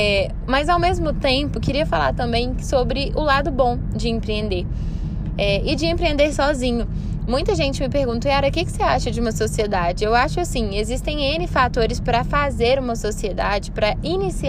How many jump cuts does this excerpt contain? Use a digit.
1